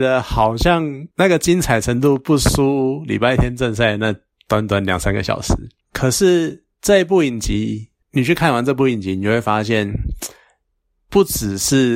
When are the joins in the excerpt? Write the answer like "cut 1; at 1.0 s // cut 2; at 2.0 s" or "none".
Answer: cut 1; at 1.1 s // cut 2; at 5.8 s